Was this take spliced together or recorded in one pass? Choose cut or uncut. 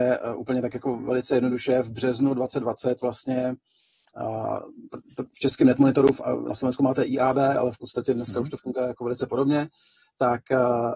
uncut